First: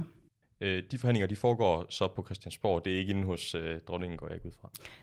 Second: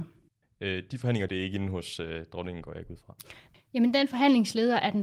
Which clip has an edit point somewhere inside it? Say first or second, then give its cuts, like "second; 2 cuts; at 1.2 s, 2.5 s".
second; 2 cuts; at 1.3 s, 3.5 s